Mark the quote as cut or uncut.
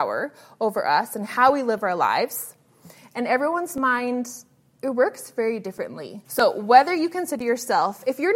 cut